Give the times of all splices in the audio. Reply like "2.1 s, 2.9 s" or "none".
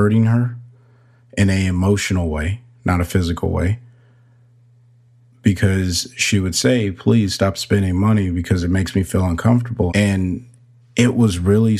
9.9 s

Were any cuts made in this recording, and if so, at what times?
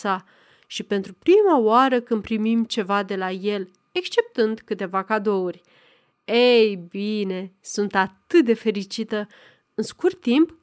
none

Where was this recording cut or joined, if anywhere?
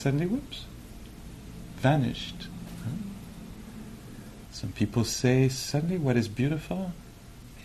4.5 s

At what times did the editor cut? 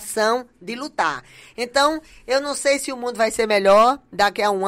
none

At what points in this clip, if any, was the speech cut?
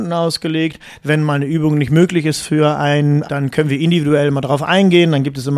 1.0 s, 3.2 s

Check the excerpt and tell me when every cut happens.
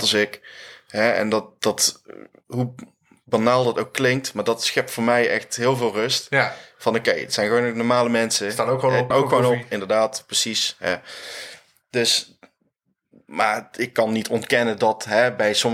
9.1 s

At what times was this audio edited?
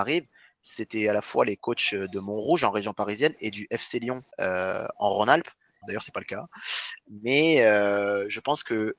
4.3 s, 5.8 s

